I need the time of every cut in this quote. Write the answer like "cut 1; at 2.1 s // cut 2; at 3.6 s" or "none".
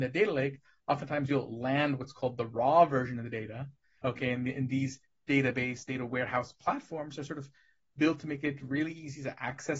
cut 1; at 4.0 s